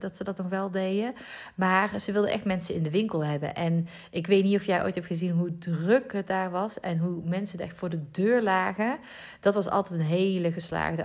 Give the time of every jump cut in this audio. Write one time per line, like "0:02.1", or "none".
none